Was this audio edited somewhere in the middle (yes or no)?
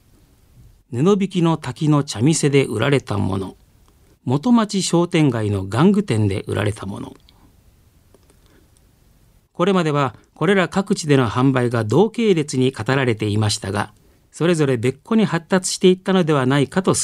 yes